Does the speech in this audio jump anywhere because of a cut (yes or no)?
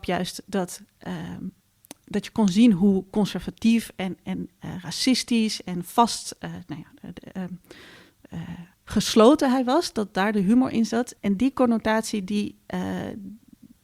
yes